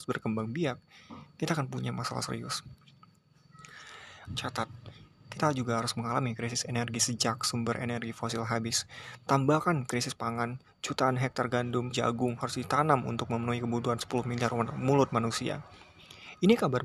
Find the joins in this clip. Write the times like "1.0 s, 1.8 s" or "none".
4.3 s, 11.9 s